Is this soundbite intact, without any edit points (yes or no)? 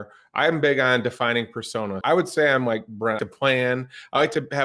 no